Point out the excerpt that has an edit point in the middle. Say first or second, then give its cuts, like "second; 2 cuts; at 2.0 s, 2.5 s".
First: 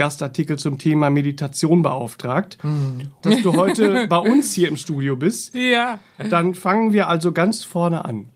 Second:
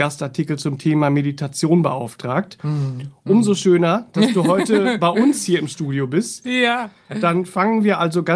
first; 1 cut; at 3.2 s